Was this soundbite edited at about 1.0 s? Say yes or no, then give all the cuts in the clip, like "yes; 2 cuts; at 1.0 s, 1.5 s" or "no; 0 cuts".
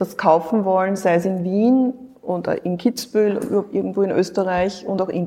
no; 0 cuts